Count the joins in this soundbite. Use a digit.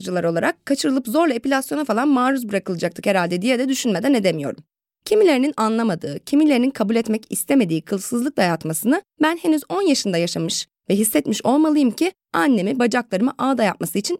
0